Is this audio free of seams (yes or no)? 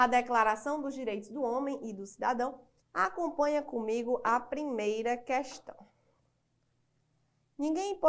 no